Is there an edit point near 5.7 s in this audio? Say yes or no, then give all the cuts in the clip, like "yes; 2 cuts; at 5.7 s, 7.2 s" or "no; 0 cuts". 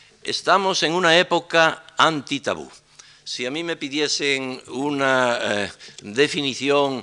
no; 0 cuts